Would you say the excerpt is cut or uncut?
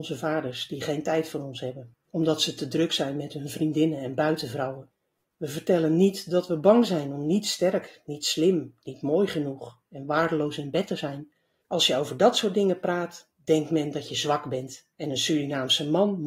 cut